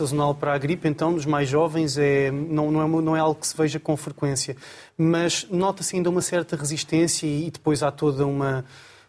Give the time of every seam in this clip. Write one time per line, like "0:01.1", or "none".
0:04.9